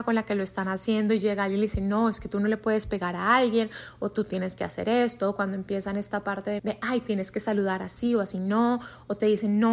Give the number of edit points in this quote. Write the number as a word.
one